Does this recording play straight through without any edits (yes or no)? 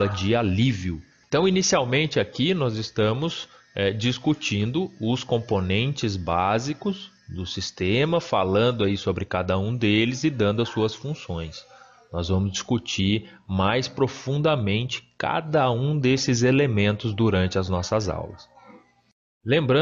yes